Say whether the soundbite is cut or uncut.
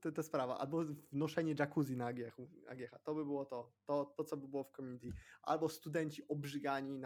cut